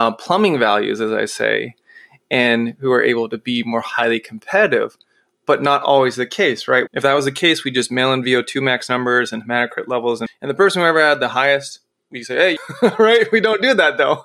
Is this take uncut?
no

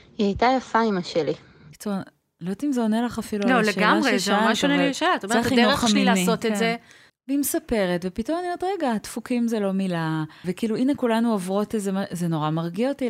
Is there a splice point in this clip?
yes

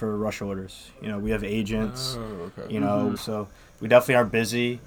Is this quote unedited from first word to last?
no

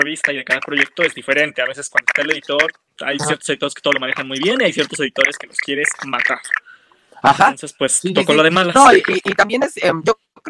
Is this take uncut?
yes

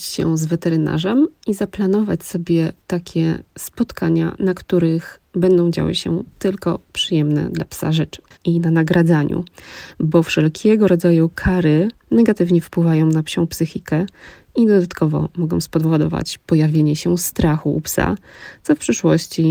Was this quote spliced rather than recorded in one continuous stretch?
yes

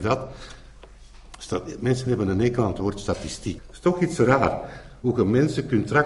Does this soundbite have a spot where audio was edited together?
yes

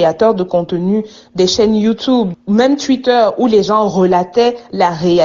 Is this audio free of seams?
no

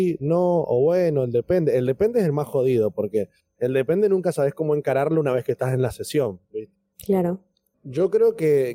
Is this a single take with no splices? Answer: no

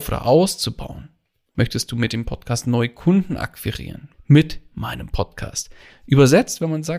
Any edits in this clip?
yes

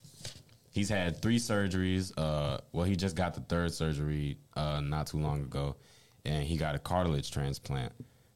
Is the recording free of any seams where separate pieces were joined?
yes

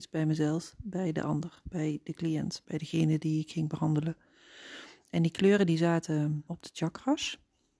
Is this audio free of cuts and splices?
no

